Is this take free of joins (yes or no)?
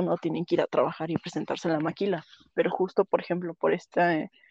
yes